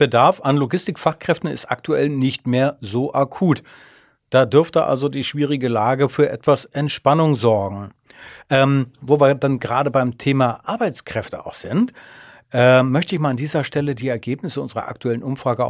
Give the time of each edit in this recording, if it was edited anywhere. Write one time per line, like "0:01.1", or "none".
none

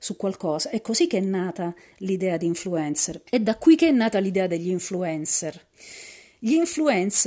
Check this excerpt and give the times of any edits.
0:03.3

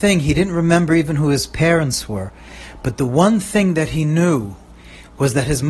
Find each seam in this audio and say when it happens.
none

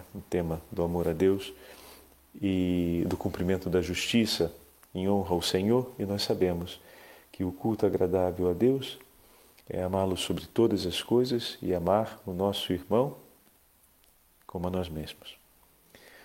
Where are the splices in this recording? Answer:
none

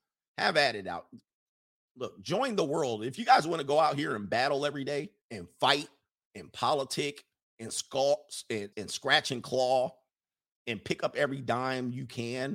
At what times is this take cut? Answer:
0:05.2
0:08.7

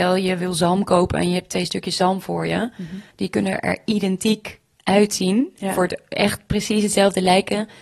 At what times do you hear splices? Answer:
none

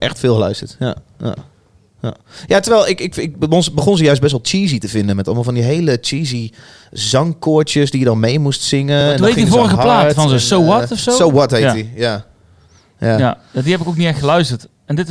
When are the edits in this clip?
none

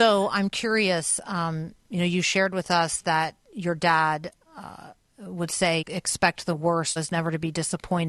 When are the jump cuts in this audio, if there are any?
0:05.8
0:07.0

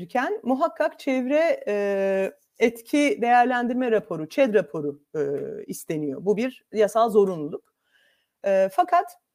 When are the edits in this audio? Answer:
none

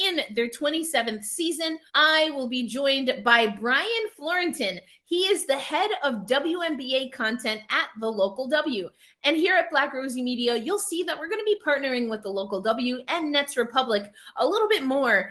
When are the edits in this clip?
0:01.9

